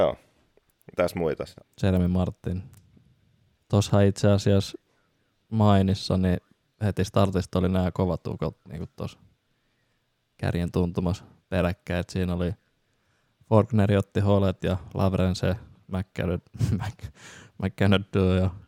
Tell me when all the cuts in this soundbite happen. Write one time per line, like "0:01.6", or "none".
0:01.6
0:03.6